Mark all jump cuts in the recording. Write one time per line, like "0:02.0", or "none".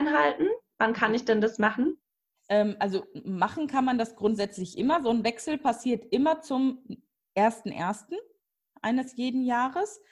none